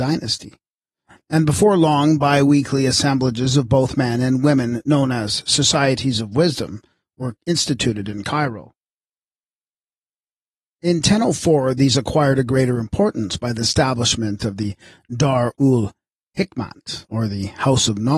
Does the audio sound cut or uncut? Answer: uncut